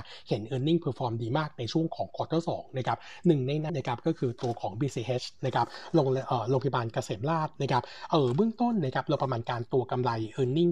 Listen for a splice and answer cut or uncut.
cut